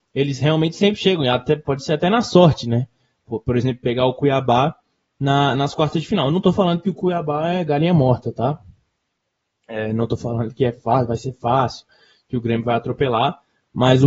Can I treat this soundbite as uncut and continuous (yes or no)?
yes